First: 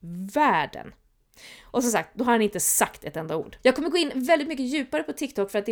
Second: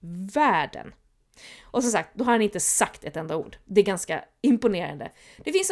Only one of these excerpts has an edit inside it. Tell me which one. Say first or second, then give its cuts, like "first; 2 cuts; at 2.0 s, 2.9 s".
first; 1 cut; at 3.6 s